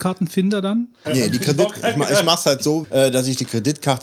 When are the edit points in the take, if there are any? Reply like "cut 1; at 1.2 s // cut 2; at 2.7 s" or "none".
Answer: cut 1; at 1.0 s // cut 2; at 2.8 s